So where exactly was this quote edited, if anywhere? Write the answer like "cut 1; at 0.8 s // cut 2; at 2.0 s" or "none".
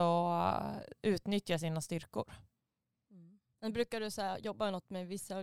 none